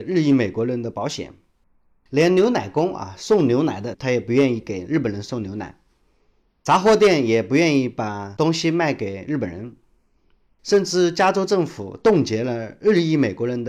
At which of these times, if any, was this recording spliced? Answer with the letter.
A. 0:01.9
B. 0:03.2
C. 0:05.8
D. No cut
D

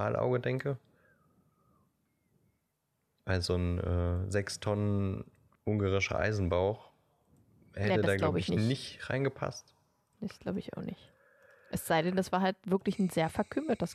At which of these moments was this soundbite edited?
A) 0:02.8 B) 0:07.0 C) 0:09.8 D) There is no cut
D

